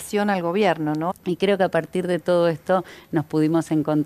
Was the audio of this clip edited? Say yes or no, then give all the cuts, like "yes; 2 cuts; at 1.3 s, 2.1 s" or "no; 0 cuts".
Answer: yes; 1 cut; at 1.1 s